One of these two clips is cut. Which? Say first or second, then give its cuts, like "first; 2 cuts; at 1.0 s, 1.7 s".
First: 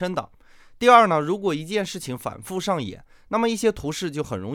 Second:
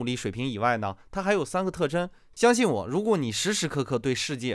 second; 1 cut; at 2.3 s